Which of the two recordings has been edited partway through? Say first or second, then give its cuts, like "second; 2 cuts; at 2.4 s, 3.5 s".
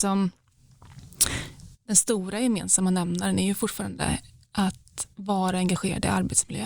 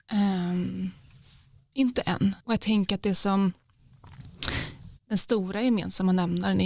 second; 1 cut; at 2.4 s